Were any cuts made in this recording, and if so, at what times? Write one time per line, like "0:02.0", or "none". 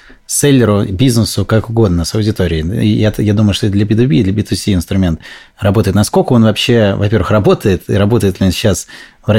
none